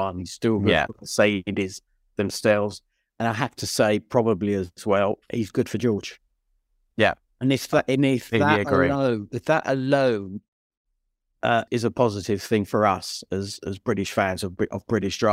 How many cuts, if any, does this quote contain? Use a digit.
1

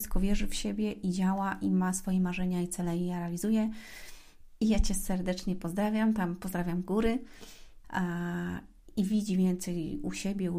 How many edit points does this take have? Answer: 2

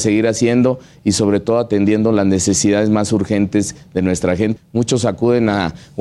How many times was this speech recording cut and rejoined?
1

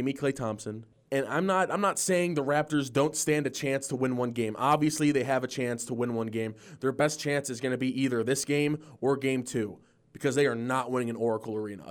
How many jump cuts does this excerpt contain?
1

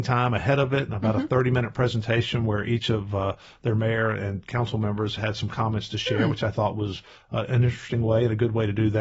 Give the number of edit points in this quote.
0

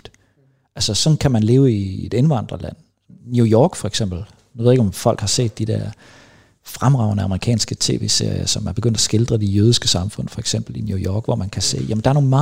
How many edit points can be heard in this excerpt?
0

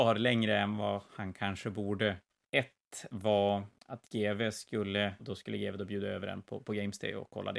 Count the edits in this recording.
2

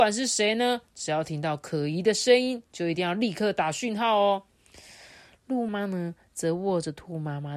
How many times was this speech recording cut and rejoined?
1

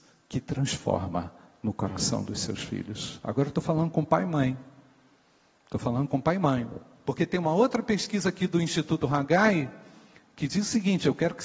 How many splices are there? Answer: 0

